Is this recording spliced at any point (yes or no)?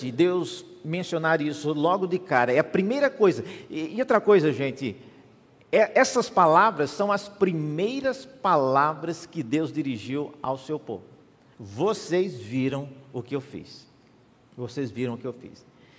no